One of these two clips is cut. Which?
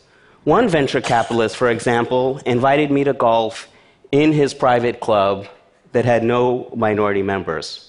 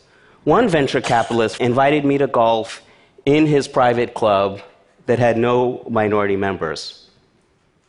second; 1 cut; at 1.6 s

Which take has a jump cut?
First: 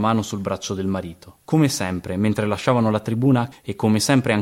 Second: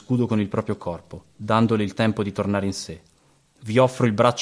first; 2 cuts; at 1.4 s, 3.5 s

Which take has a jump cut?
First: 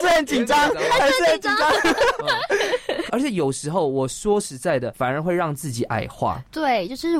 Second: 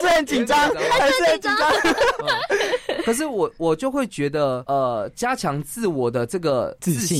first; 2 cuts; at 3.1 s, 4.9 s

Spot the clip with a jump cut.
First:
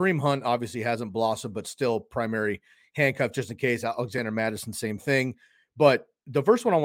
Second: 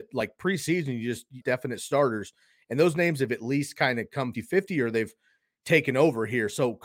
second; 2 cuts; at 1.4 s, 4.3 s

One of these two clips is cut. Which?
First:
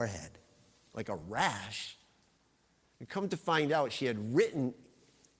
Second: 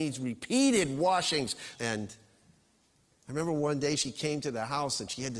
second; 1 cut; at 1.8 s

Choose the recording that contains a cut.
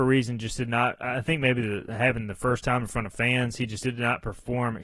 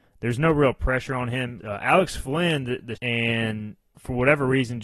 second; 2 cuts; at 1.6 s, 3.0 s

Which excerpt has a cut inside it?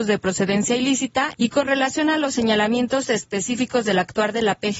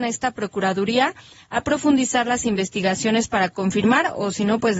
first; 1 cut; at 1.3 s

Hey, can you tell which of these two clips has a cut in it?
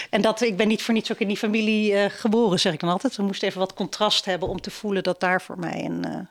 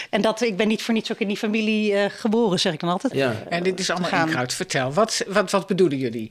second; 1 cut; at 3.1 s

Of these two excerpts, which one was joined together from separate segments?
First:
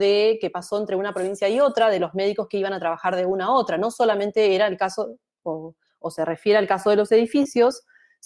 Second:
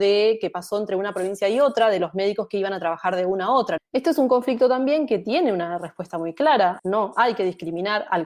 second; 2 cuts; at 3.8 s, 6.8 s

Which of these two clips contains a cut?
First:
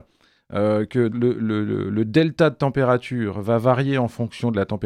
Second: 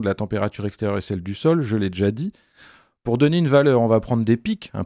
first; 1 cut; at 1.1 s

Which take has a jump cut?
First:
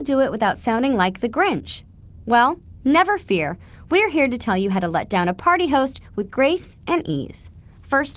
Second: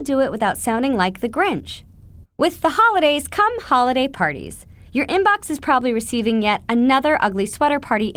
second; 1 cut; at 2.2 s

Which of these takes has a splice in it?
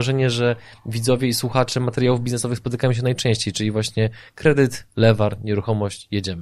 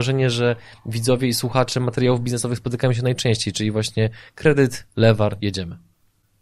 second; 1 cut; at 5.4 s

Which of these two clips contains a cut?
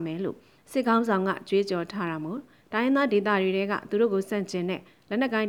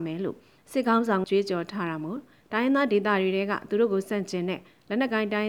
second; 1 cut; at 1.2 s

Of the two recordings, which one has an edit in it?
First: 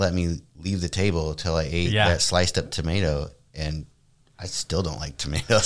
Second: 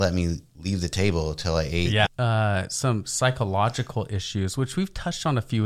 second; 1 cut; at 2.0 s

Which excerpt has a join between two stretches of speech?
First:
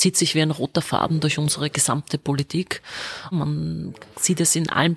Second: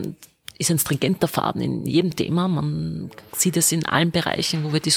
first; 1 cut; at 3.3 s

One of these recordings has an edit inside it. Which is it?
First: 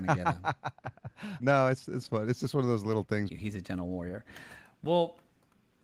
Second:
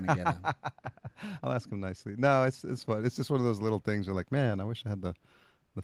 first; 2 cuts; at 1.4 s, 3.3 s

